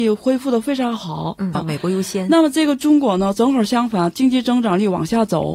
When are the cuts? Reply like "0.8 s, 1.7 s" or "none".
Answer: 1.5 s